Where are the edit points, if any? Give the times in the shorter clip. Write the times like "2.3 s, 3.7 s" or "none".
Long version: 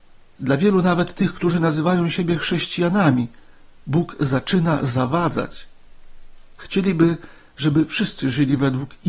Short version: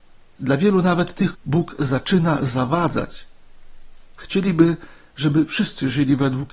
1.3 s